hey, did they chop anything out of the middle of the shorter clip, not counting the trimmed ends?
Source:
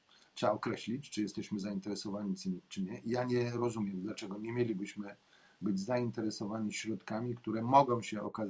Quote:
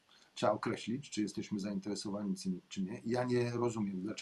no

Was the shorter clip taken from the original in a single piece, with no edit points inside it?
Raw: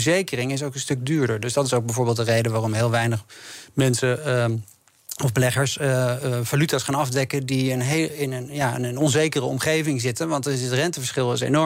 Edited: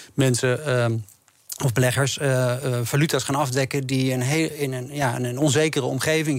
yes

